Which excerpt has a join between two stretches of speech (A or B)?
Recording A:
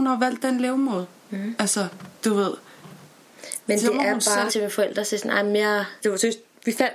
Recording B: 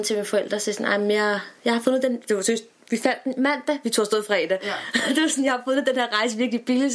A